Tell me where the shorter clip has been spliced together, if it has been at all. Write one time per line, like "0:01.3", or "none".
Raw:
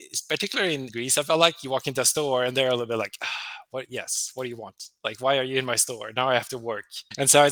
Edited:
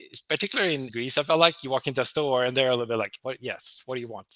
0:03.2